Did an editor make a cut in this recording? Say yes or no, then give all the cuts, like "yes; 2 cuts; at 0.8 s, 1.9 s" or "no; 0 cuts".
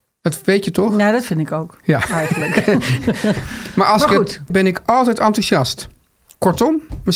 yes; 1 cut; at 4.5 s